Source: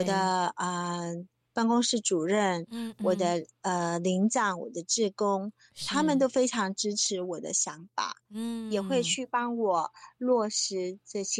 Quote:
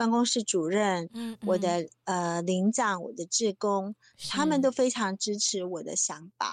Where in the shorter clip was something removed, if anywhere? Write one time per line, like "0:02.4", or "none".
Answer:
none